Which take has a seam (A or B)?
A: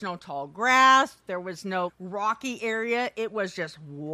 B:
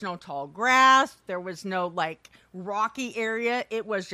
A